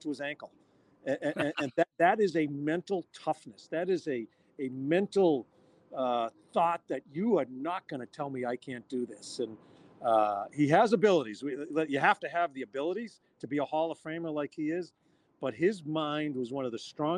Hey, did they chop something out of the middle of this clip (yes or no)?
no